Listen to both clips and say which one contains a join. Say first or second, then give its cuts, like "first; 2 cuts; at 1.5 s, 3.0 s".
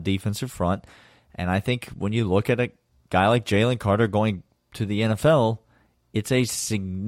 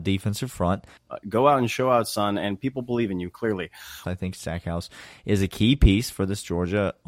second; 2 cuts; at 1.0 s, 4.0 s